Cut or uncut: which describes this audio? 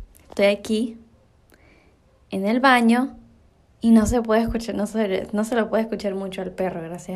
uncut